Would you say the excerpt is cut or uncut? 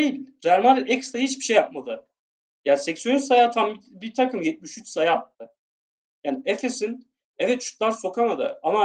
uncut